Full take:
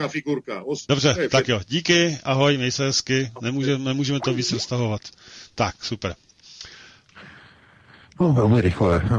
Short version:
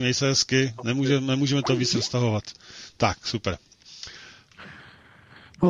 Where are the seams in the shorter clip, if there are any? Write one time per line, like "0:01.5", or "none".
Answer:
none